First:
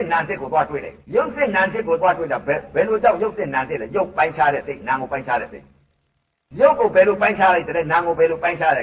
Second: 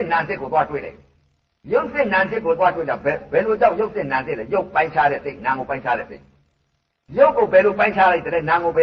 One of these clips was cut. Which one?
first; 1 cut; at 1.0 s

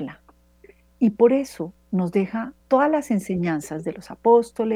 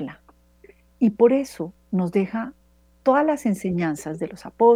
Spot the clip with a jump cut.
first; 1 cut; at 2.6 s

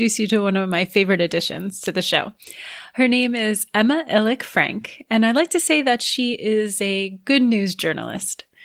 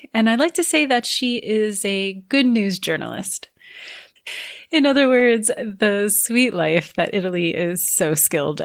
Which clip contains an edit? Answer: second; 1 cut; at 4.2 s

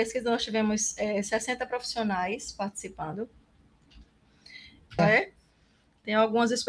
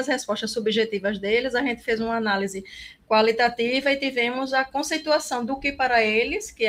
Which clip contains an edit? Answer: first; 1 cut; at 5.0 s

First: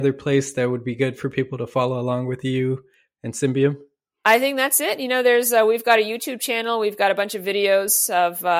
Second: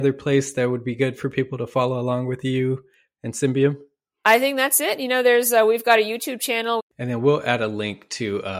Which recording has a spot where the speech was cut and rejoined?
second; 1 cut; at 6.8 s

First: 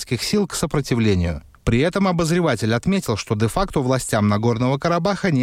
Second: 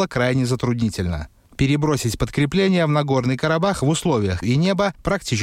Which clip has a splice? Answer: second; 1 cut; at 4.4 s

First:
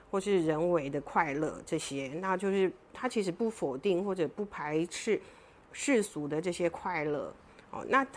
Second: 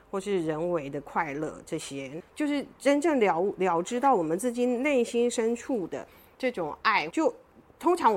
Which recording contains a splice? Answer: second; 2 cuts; at 2.2 s, 7.1 s

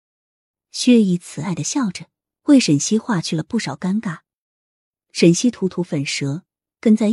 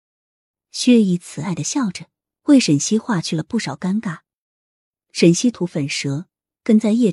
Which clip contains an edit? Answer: second; 1 cut; at 5.5 s

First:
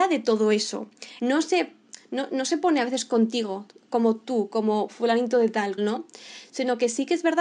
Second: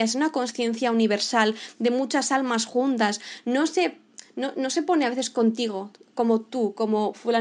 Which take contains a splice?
first; 2 cuts; at 1.2 s, 5.8 s

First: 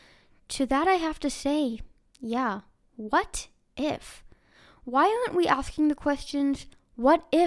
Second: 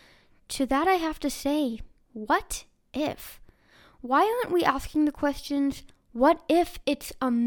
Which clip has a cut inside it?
second; 1 cut; at 2.0 s

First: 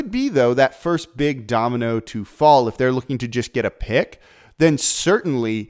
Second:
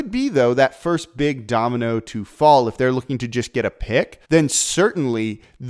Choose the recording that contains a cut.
second; 1 cut; at 4.2 s

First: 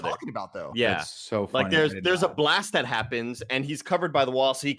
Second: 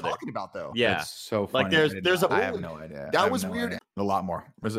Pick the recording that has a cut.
second; 2 cuts; at 2.3 s, 3.8 s

